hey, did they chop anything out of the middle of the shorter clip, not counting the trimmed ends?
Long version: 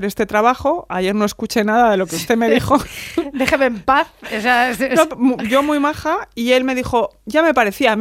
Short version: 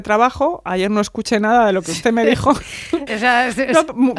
yes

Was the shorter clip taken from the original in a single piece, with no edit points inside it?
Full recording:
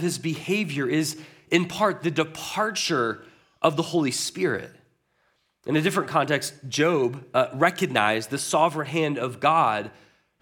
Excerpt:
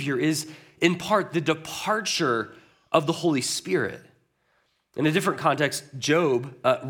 yes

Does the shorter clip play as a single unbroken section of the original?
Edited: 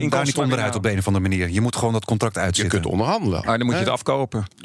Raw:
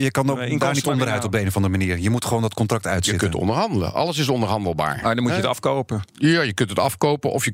no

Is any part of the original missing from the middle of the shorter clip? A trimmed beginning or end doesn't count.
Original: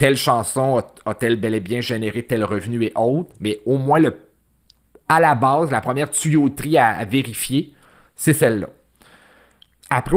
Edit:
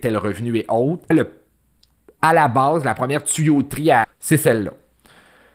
yes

